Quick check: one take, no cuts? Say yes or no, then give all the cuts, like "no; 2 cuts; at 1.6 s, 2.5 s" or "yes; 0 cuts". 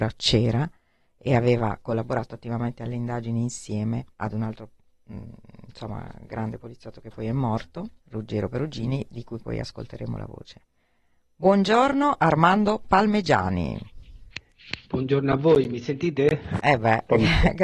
no; 3 cuts; at 4.1 s, 8.0 s, 16.6 s